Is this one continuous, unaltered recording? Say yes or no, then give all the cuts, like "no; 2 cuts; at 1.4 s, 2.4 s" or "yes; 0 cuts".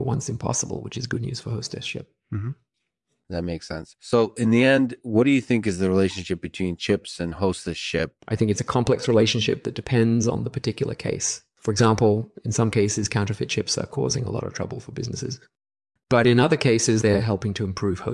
no; 2 cuts; at 8.2 s, 17.0 s